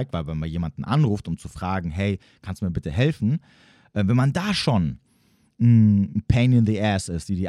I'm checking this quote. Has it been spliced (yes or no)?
no